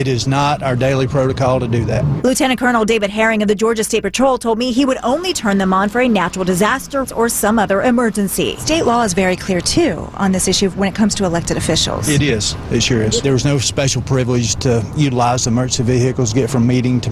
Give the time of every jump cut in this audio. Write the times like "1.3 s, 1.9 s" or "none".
7.0 s